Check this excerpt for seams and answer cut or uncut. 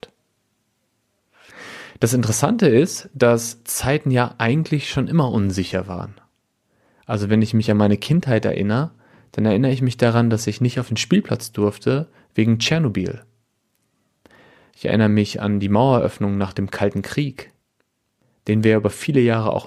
uncut